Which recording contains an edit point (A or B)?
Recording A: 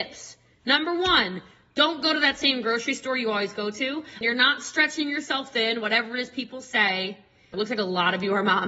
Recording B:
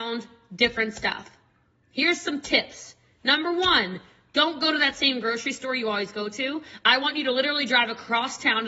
A